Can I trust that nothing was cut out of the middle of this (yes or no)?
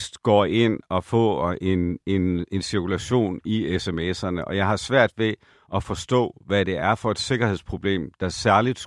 yes